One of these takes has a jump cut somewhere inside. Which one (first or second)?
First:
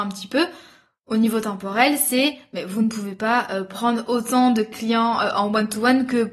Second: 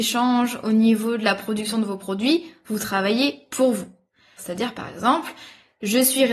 second